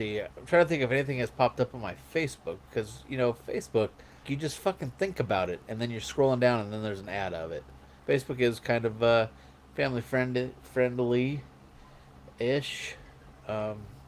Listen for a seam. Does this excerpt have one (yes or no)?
yes